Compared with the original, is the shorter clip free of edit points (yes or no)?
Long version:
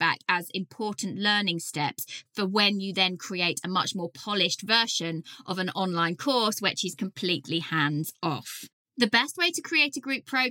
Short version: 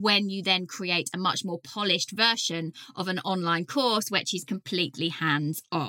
yes